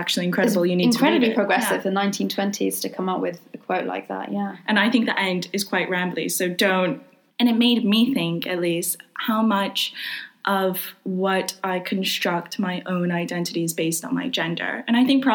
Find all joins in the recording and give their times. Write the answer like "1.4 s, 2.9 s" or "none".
7.3 s